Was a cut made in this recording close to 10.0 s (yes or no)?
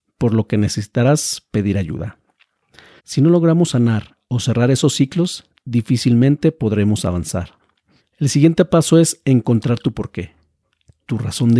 no